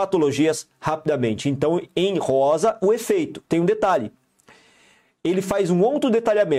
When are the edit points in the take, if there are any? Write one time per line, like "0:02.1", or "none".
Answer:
0:03.4